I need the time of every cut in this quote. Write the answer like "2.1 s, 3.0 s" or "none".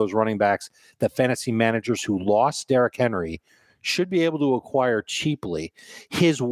none